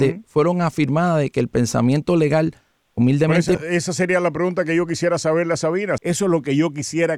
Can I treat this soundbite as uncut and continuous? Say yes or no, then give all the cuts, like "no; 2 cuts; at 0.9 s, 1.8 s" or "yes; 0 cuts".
no; 2 cuts; at 3.5 s, 6.0 s